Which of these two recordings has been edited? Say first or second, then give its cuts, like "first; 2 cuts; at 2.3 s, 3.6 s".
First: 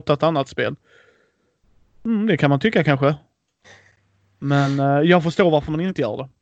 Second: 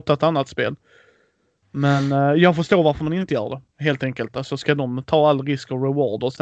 second; 1 cut; at 1.6 s